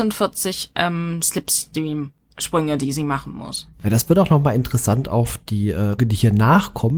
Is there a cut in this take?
yes; 1 cut; at 6.0 s

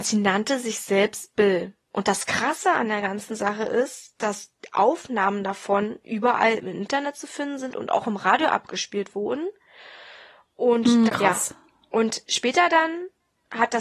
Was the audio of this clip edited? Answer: yes; 1 cut; at 11.1 s

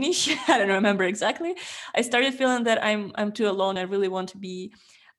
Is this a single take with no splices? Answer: yes; 0 cuts

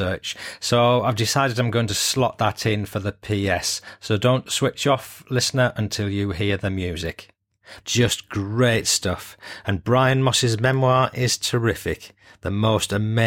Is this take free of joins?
no; 1 cut; at 7.8 s

